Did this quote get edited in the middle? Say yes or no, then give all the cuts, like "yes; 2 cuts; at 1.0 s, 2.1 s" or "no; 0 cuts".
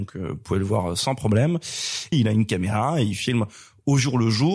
yes; 1 cut; at 2.1 s